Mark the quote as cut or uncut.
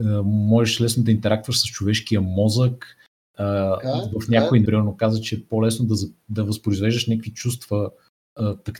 cut